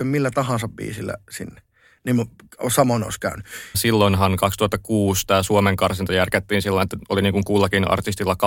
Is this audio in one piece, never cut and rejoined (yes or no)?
no